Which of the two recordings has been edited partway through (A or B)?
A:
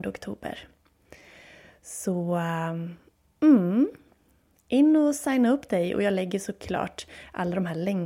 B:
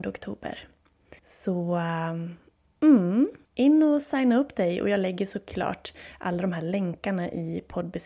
B